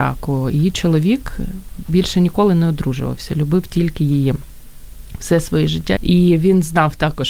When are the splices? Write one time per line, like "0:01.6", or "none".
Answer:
0:06.0